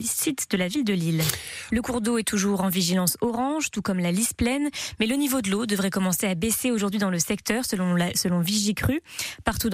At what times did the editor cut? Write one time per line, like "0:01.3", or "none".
0:01.7